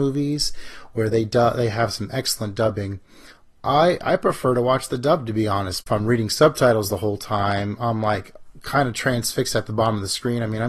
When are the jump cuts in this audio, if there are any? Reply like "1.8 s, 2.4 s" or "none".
none